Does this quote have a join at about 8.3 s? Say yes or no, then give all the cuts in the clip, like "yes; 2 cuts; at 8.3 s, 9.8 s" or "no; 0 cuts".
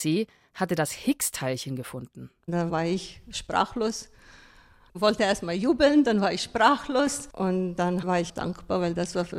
yes; 1 cut; at 8.3 s